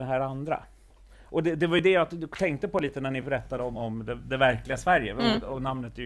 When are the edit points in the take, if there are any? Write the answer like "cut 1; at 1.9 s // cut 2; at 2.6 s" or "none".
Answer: cut 1; at 3.7 s

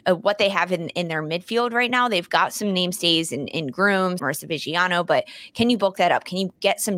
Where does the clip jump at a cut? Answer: cut 1; at 4.2 s

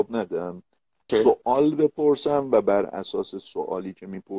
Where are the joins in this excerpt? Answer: none

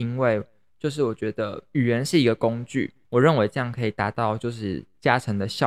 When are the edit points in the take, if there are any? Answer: cut 1; at 3.0 s

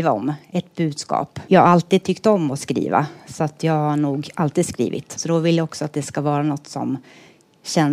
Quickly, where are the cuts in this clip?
cut 1; at 1.5 s // cut 2; at 5.2 s

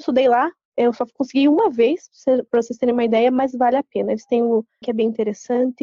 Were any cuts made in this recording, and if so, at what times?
cut 1; at 4.8 s

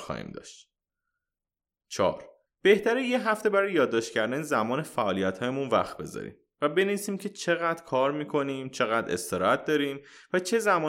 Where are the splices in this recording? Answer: cut 1; at 2.5 s

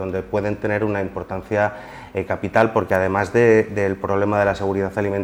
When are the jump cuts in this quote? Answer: none

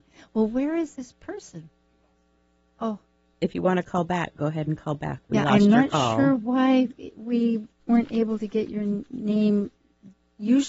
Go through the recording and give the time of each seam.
none

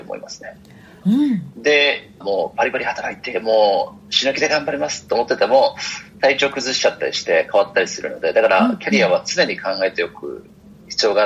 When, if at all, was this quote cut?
cut 1; at 1.0 s // cut 2; at 2.2 s

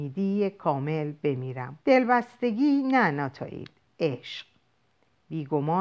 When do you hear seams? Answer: cut 1; at 1.8 s

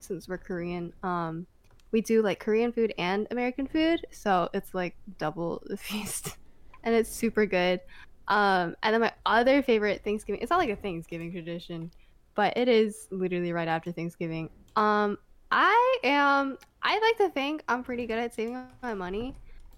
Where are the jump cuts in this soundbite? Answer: none

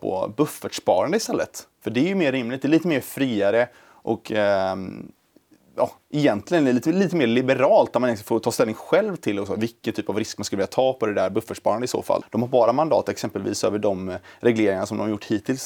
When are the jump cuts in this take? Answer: cut 1; at 12.2 s

